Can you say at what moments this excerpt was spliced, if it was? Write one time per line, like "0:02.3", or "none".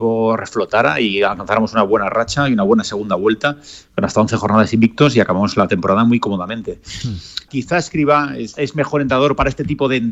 0:07.5
0:08.5